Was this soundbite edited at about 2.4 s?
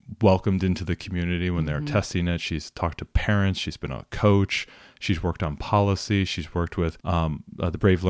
no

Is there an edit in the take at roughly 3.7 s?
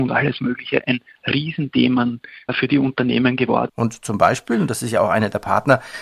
yes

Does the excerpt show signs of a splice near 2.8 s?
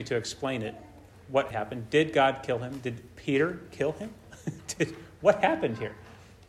no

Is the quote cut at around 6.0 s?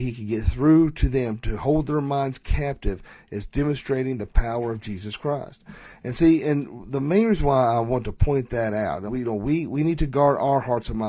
no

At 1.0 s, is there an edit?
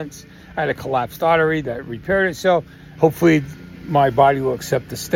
no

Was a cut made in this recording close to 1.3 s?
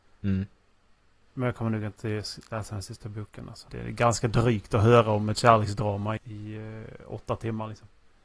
no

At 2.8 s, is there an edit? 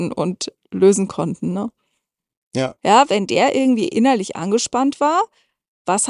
yes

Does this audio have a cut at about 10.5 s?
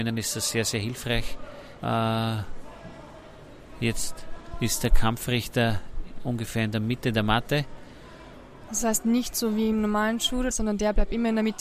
yes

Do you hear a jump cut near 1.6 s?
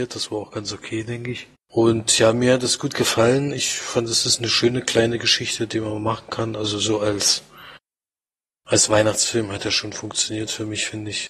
yes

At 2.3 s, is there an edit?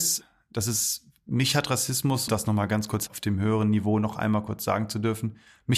yes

